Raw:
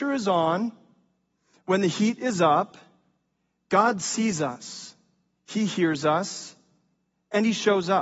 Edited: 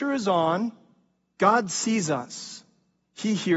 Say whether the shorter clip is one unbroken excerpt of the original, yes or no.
no